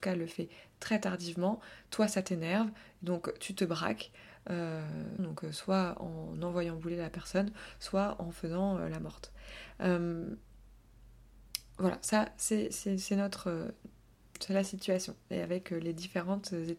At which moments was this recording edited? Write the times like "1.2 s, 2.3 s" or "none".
5.2 s

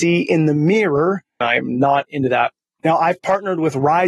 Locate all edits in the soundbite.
1.4 s, 2.8 s

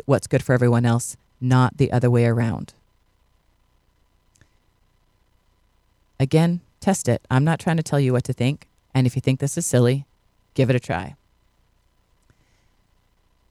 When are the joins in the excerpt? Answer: 8.8 s

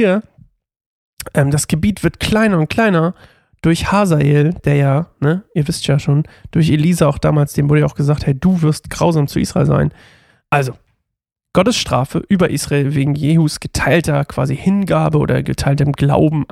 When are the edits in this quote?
10.4 s

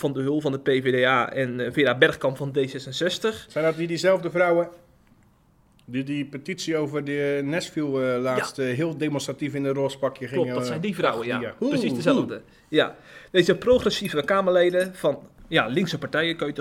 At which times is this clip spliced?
15.4 s

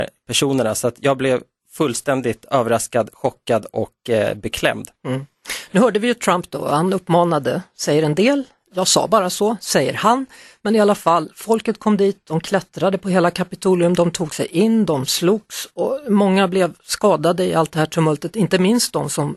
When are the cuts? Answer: none

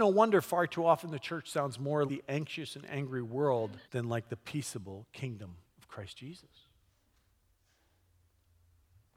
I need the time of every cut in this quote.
2.1 s, 3.8 s

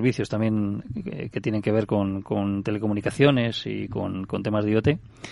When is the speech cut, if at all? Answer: none

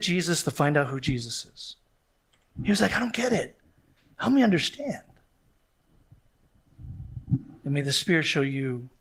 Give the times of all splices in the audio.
2.6 s

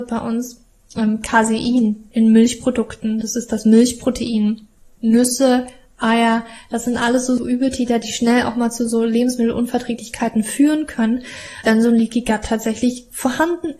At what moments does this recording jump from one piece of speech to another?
5.0 s, 7.4 s, 11.6 s

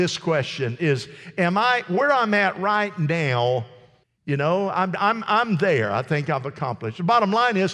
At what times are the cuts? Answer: 4.0 s

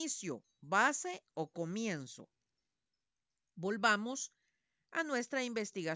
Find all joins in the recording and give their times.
none

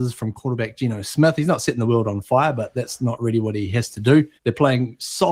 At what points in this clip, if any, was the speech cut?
4.4 s

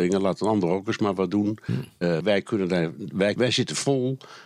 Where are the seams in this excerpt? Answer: 2.2 s, 3.4 s

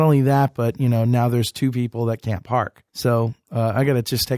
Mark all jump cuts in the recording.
2.9 s

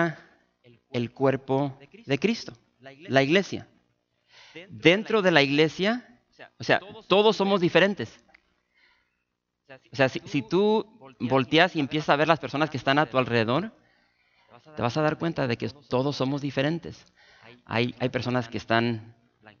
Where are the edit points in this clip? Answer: none

